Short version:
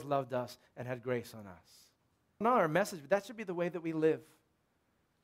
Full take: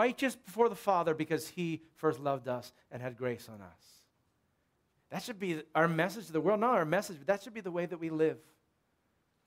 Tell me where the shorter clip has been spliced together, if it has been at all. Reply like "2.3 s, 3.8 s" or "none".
2.4 s